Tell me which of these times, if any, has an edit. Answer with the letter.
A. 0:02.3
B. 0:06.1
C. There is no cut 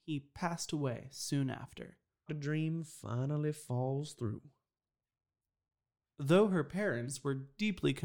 A